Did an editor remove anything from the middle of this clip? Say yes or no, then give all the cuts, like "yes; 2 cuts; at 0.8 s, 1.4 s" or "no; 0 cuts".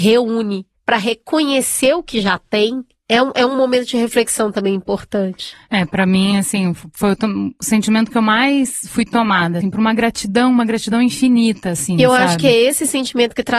yes; 1 cut; at 9.6 s